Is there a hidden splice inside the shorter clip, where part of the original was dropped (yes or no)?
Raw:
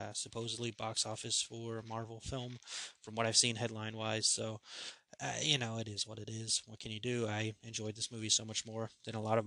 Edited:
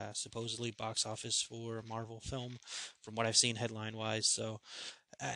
no